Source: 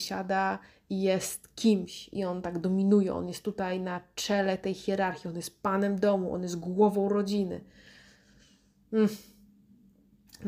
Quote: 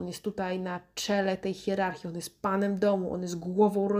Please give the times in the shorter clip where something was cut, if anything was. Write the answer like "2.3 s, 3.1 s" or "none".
none